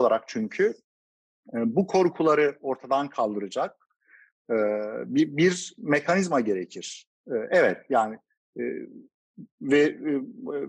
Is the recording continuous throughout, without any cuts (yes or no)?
yes